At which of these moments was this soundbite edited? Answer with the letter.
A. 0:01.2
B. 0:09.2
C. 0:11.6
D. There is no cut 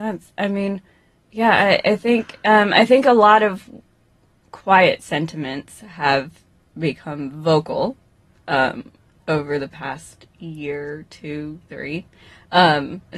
C